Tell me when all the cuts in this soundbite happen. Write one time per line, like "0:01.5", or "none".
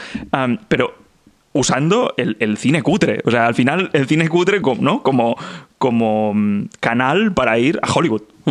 0:04.6